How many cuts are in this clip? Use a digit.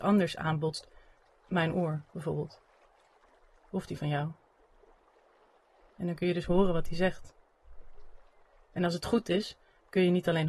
0